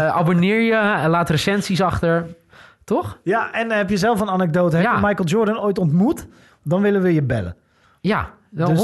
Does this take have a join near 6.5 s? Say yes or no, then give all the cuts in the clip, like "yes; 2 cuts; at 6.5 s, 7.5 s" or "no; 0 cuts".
no; 0 cuts